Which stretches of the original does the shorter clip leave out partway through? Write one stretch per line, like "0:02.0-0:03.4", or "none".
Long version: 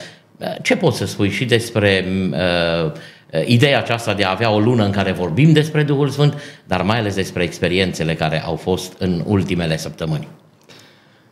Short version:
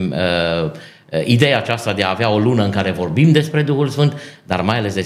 none